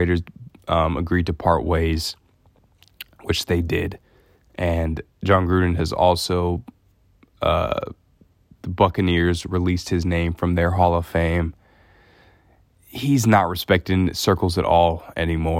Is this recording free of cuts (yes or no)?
yes